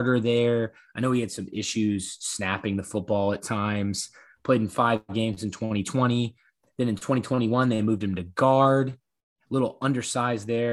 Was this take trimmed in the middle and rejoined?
no; 0 cuts

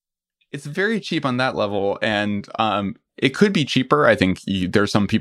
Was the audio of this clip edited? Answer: no; 0 cuts

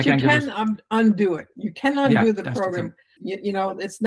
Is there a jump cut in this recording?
yes; 1 cut; at 3.2 s

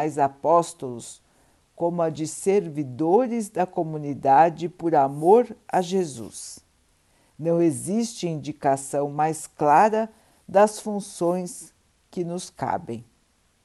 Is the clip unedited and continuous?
yes; 0 cuts

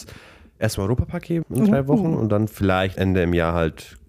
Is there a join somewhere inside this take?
yes; 2 cuts; at 1.4 s, 2.9 s

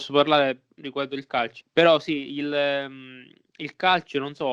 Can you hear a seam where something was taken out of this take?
yes; 1 cut; at 1.6 s

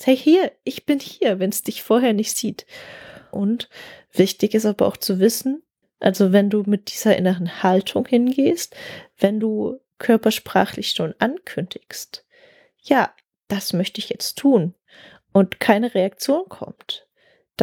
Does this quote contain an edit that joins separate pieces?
yes; 2 cuts; at 3.3 s, 5.8 s

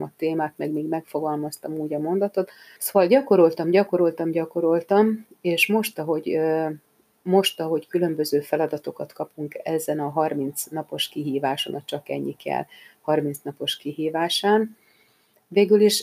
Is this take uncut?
no; 1 cut; at 2.8 s

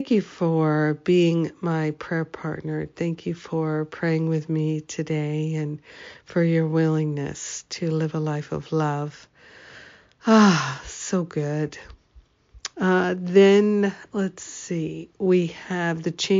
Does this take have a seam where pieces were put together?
yes; 1 cut; at 12.7 s

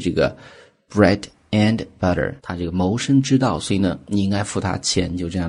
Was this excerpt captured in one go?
no; 1 cut; at 2.4 s

